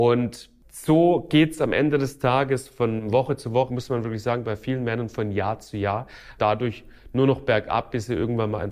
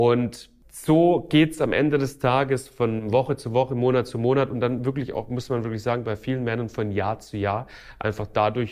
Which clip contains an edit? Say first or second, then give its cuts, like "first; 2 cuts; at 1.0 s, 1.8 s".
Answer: first; 2 cuts; at 3.7 s, 6.4 s